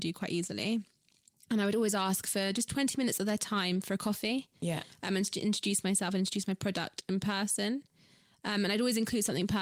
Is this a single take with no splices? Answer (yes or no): yes